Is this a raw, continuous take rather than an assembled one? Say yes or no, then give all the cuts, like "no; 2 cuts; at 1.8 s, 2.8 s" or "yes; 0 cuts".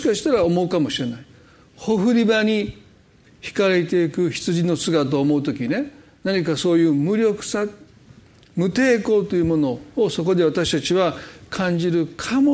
yes; 0 cuts